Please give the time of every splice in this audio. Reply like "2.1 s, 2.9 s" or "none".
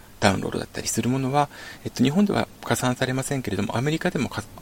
none